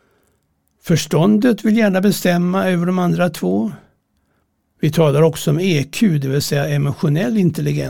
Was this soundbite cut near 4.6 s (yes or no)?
yes